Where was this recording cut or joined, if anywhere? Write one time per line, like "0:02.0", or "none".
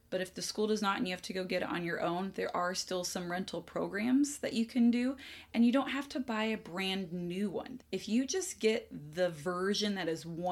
0:07.8